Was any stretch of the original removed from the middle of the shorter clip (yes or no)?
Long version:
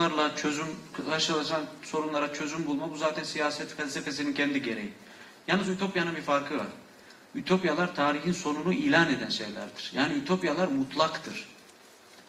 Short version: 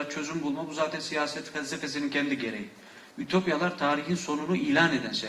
yes